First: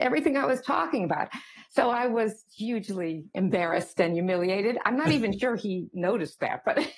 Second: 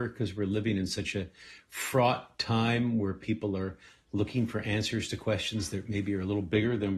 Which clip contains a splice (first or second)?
first